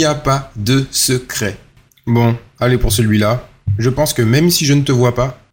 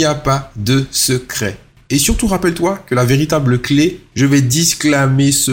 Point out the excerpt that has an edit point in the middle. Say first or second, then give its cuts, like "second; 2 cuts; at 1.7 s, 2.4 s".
second; 2 cuts; at 1.8 s, 4.1 s